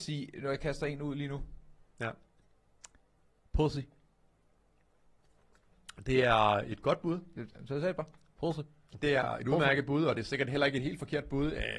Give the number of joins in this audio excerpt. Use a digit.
0